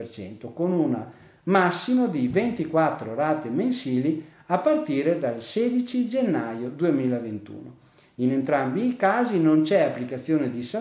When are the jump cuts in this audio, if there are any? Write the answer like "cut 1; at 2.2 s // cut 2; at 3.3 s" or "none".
none